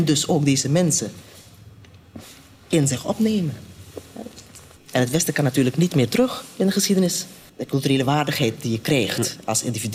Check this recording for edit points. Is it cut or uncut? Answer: cut